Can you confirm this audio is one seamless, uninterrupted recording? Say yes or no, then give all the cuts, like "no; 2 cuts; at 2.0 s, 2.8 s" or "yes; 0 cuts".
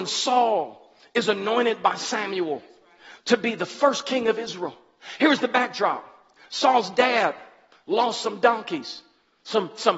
yes; 0 cuts